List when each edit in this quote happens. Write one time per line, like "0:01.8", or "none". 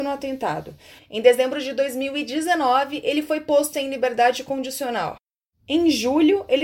0:01.0